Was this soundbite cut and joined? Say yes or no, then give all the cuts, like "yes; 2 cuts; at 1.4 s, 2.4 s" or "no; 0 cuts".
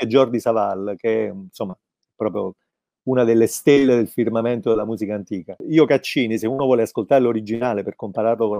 no; 0 cuts